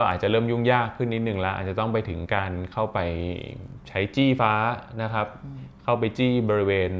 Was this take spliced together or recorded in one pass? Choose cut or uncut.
cut